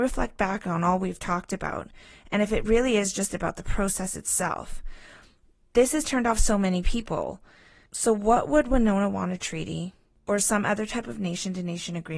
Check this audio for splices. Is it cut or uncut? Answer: uncut